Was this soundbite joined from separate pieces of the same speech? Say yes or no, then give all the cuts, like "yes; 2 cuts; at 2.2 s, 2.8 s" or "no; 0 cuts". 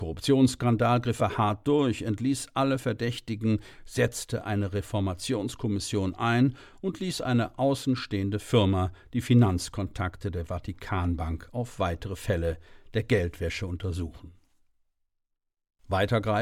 no; 0 cuts